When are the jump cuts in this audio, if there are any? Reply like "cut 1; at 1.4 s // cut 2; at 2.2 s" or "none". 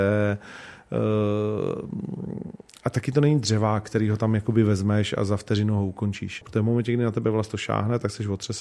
cut 1; at 6.4 s